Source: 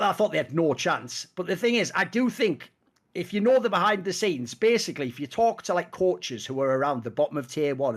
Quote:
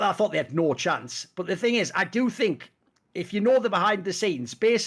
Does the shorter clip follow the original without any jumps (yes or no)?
yes